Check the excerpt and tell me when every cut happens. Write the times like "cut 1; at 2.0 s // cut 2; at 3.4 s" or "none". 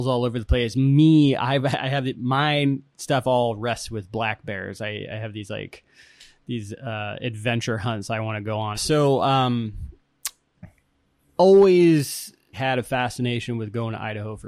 cut 1; at 8.7 s // cut 2; at 12.5 s